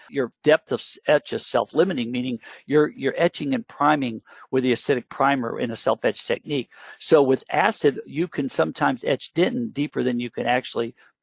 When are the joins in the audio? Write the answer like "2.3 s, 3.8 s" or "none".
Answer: 2.9 s